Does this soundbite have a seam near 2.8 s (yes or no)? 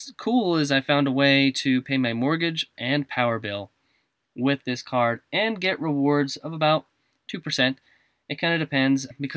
yes